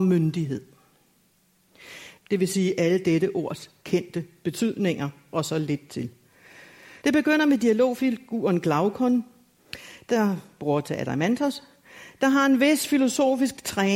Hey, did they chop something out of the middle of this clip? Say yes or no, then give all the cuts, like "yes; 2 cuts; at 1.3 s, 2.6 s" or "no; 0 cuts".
yes; 2 cuts; at 2.2 s, 7.0 s